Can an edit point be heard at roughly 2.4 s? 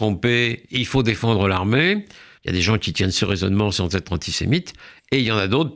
yes; 1 cut; at 2.4 s

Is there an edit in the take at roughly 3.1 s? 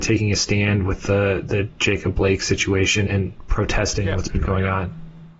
yes; 1 cut; at 3.1 s

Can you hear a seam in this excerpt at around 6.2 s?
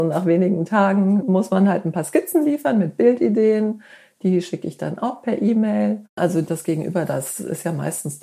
yes; 1 cut; at 6.2 s

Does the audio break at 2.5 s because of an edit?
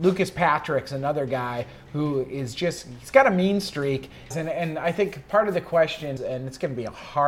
no; 2 cuts; at 4.3 s, 6.2 s

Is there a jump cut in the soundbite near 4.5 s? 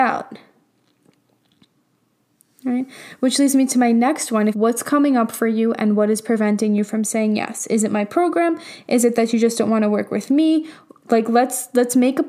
yes; 1 cut; at 4.5 s

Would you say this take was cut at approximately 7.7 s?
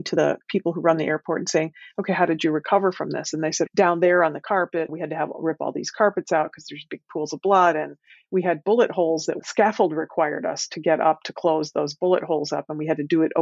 no; 0 cuts

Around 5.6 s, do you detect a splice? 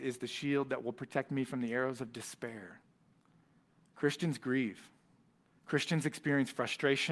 yes; 1 cut; at 5.6 s

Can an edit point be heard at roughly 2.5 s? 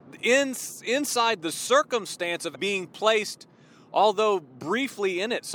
yes; 1 cut; at 2.5 s

